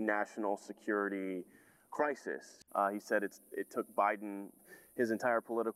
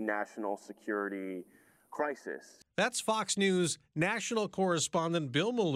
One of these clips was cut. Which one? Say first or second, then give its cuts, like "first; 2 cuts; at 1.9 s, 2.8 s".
first; 2 cuts; at 2.7 s, 4.6 s